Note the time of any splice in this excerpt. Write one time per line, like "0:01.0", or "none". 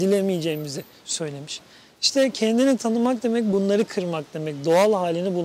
none

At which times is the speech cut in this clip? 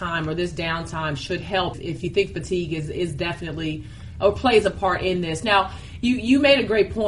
0:01.7

